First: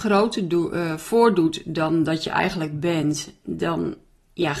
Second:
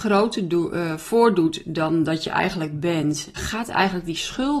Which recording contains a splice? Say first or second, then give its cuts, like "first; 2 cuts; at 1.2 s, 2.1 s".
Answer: second; 1 cut; at 3.4 s